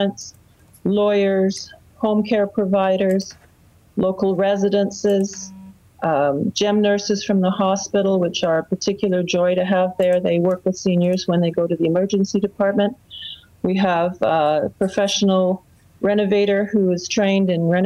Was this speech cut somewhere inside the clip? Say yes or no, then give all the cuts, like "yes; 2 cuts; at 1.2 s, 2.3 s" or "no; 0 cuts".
no; 0 cuts